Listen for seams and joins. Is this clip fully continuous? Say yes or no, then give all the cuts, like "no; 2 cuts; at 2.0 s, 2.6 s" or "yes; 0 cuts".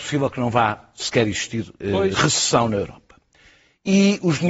no; 1 cut; at 1.8 s